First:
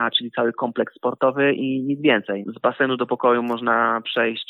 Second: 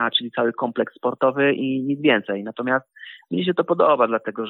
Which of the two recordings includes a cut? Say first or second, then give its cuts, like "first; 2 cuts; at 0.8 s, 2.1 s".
first; 1 cut; at 2.4 s